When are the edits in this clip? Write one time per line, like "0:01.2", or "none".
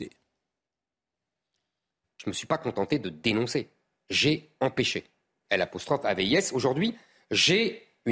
0:05.4